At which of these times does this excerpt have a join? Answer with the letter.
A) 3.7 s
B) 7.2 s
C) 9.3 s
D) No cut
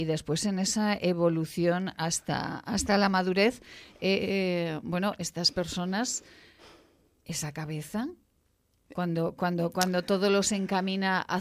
D